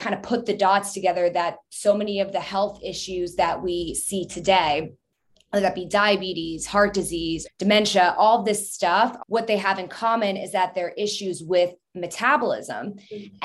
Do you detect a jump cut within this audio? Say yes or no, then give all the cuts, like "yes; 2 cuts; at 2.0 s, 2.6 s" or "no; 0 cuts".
yes; 2 cuts; at 7.4 s, 9.2 s